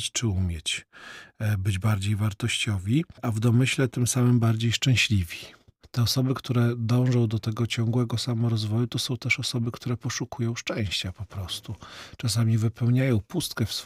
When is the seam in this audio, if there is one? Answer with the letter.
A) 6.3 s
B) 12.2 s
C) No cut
C